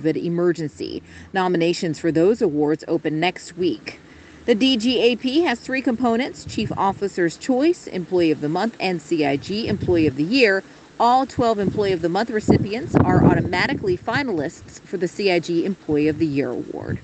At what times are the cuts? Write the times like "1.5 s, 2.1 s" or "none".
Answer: none